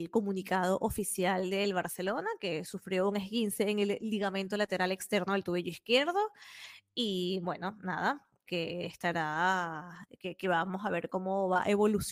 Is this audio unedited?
no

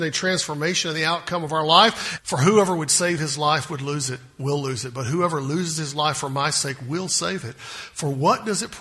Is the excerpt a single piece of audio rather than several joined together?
no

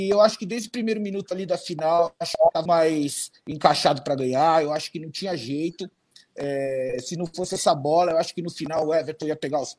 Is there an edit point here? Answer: yes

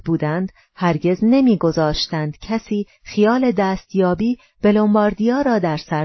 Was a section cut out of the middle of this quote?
no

